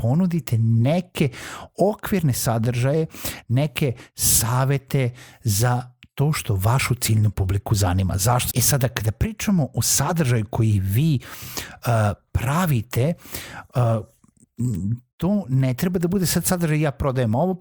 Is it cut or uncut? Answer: cut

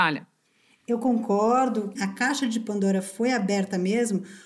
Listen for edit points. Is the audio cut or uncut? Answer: cut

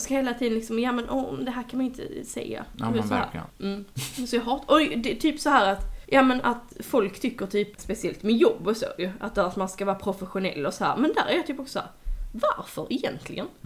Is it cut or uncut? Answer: cut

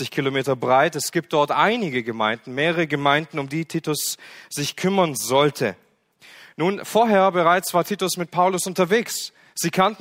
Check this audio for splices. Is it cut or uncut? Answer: uncut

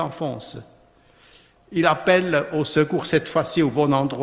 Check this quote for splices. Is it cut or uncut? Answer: cut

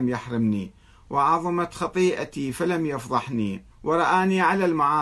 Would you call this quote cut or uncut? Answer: cut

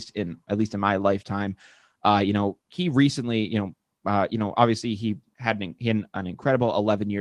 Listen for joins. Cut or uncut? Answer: uncut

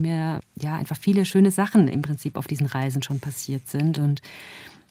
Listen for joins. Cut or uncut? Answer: uncut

